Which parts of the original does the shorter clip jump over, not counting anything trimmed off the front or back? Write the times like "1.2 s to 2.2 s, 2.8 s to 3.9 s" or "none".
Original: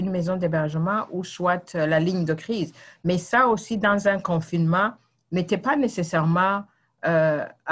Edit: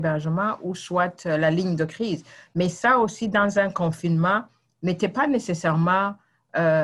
none